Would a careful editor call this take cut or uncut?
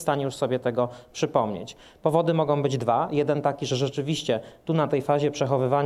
uncut